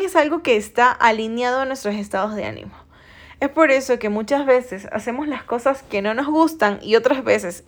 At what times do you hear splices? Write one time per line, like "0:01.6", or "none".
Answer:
none